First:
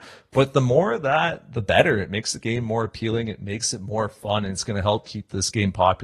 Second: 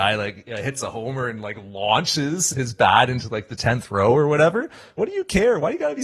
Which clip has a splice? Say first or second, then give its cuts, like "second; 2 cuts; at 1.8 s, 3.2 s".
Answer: second; 2 cuts; at 2.5 s, 5.0 s